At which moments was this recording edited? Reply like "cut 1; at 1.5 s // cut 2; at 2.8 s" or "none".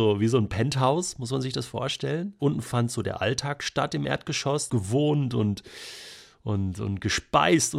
cut 1; at 2.4 s // cut 2; at 4.7 s